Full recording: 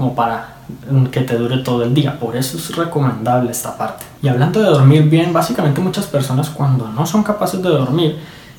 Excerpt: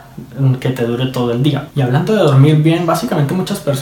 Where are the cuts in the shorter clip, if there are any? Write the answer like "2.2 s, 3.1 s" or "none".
1.7 s